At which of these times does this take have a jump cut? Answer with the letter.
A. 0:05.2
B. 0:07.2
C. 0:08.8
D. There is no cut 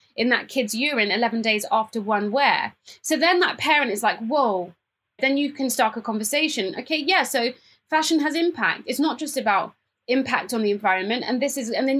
A